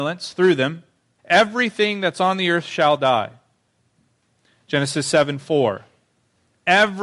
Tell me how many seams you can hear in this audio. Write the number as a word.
one